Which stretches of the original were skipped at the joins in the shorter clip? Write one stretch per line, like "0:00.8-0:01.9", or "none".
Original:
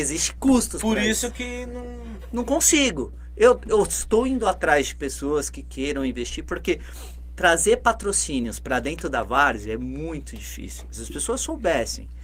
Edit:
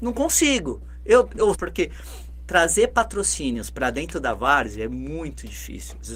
0:03.8-0:06.4